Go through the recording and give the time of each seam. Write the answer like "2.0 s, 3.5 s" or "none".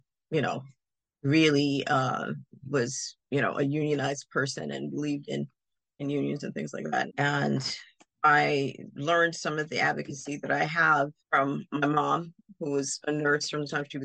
7.1 s, 11.2 s